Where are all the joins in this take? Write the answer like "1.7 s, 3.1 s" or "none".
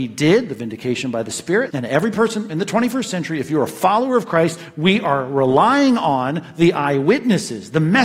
1.7 s